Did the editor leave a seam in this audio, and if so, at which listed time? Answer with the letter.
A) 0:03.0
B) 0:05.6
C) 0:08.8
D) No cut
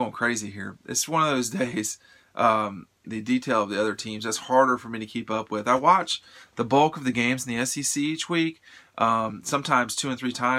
A